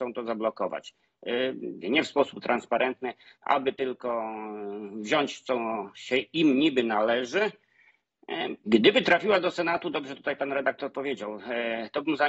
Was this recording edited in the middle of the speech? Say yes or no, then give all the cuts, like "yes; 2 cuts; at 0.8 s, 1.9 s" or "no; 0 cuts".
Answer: yes; 3 cuts; at 1.8 s, 3.3 s, 8.7 s